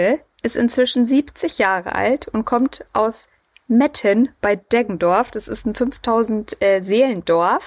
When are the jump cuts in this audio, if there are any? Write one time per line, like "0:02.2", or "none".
none